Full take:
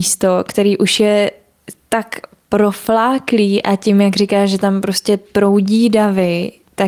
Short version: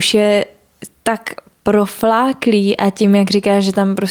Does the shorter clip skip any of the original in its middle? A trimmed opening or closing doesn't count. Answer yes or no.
no